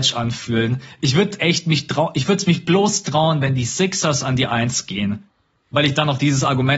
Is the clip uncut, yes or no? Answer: yes